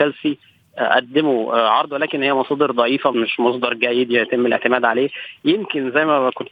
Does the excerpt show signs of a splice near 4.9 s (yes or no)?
no